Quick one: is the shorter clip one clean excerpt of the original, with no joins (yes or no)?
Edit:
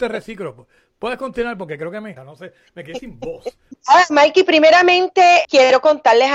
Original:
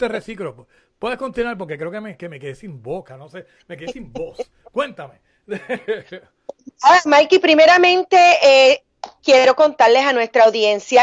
no